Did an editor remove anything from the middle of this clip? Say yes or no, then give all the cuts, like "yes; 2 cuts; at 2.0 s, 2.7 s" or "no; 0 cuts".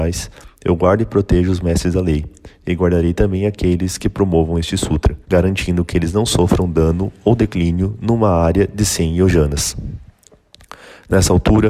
yes; 1 cut; at 5.2 s